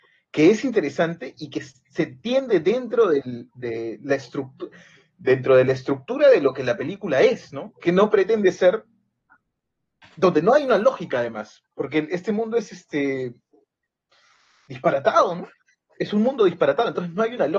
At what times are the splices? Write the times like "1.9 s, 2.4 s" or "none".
none

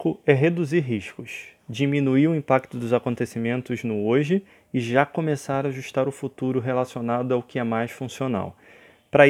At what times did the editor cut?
none

